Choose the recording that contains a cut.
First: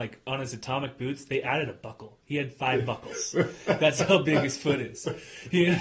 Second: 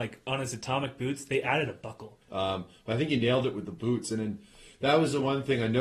second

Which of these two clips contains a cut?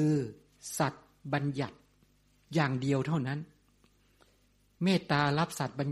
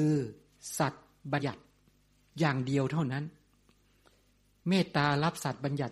second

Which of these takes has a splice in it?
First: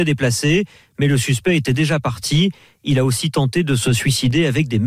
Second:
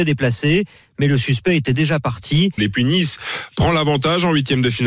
second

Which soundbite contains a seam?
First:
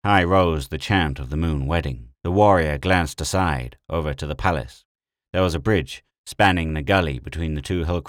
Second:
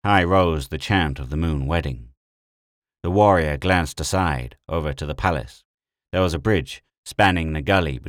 first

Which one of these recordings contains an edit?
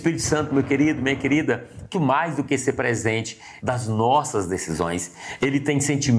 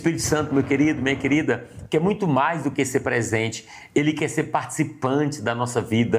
first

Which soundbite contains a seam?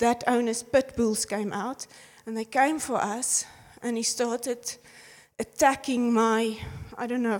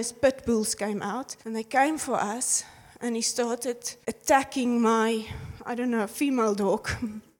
second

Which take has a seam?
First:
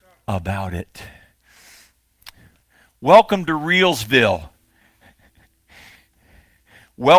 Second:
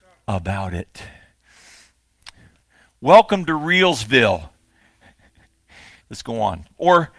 second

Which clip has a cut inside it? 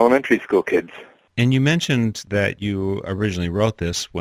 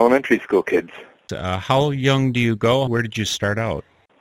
second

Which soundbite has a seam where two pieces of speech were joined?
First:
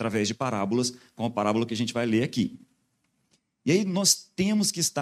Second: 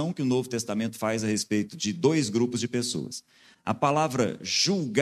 second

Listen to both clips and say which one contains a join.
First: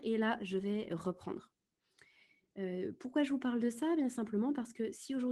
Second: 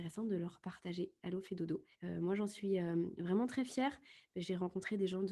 second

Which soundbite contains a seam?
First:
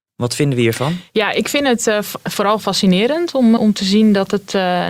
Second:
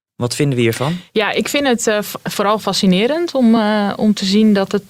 first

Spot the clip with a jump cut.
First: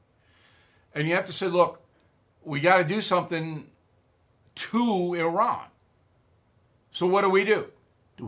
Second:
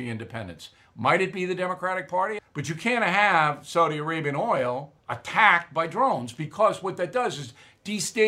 second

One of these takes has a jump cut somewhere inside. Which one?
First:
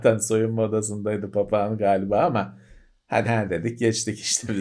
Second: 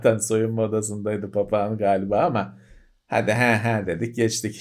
first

